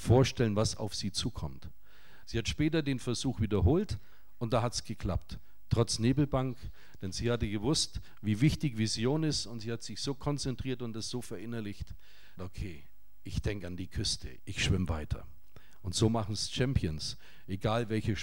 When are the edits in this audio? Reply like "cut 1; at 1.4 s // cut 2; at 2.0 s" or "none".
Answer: cut 1; at 2.2 s // cut 2; at 12.4 s // cut 3; at 14.4 s